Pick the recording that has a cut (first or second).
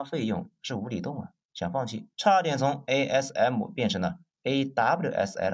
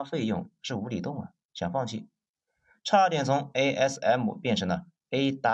first